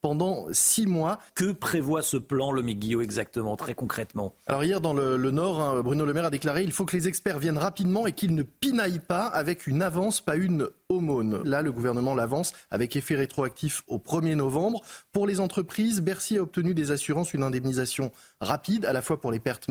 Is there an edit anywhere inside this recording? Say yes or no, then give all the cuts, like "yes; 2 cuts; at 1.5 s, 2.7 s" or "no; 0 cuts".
yes; 2 cuts; at 1.3 s, 11.4 s